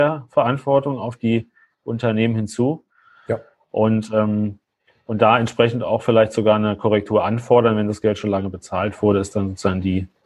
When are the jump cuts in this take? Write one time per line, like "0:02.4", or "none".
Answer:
none